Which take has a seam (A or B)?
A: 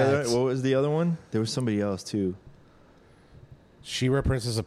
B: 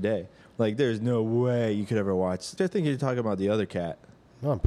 B